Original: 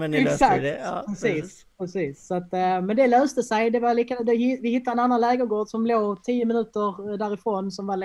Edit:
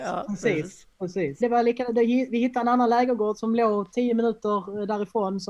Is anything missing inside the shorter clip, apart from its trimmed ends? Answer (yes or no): yes